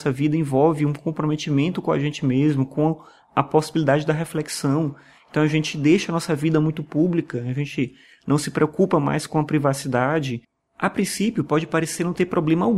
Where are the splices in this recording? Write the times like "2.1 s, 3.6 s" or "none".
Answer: none